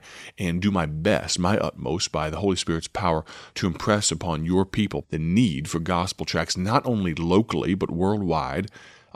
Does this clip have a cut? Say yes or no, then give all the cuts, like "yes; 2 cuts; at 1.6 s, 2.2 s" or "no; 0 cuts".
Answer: yes; 1 cut; at 5.0 s